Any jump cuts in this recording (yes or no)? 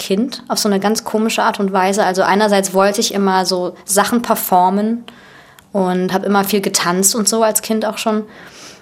no